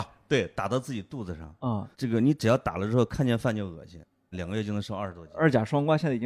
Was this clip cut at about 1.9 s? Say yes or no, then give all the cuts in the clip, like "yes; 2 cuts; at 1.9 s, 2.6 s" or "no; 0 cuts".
yes; 2 cuts; at 1.9 s, 4.3 s